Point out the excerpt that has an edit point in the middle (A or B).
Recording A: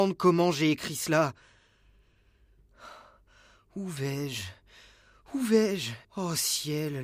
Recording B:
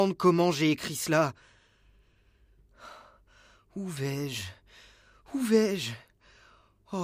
A